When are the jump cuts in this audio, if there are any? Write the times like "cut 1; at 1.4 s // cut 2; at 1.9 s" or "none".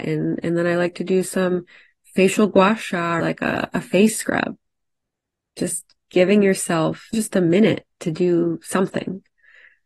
cut 1; at 3.2 s // cut 2; at 7.1 s